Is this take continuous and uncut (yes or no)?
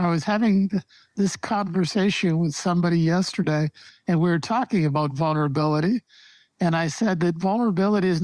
yes